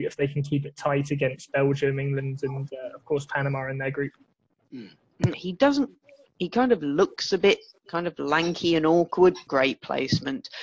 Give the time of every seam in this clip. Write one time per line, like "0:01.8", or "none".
0:05.3
0:09.5